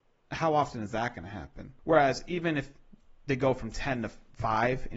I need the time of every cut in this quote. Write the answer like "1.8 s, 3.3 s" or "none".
1.8 s